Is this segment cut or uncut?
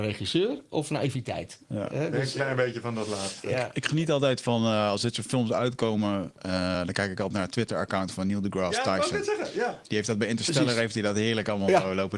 uncut